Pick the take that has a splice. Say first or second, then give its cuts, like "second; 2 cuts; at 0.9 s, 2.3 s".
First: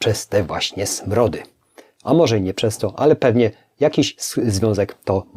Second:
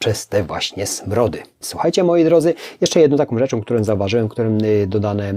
second; 1 cut; at 1.6 s